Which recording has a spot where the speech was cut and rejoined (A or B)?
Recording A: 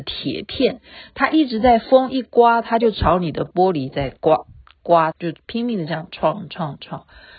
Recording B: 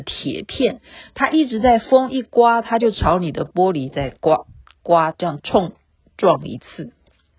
A